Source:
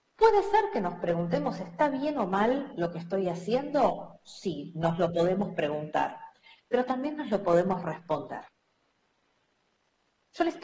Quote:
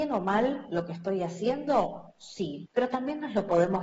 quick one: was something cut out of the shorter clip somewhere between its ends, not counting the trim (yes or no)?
yes